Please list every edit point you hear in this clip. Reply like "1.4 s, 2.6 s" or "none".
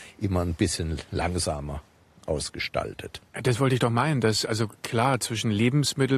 3.3 s